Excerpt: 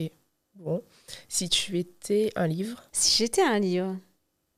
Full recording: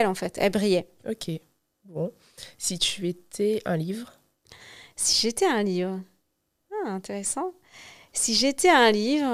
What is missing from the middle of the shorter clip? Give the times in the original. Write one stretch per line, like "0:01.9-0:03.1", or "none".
0:04.2-0:04.9